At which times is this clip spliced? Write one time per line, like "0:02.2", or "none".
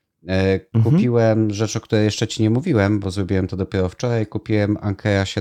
0:03.0